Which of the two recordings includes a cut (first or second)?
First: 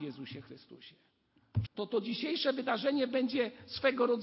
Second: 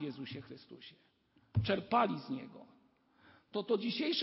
first